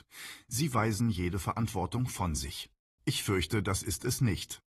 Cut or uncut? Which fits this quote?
cut